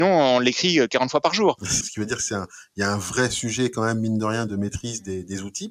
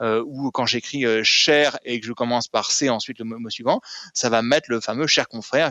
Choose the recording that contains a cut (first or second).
first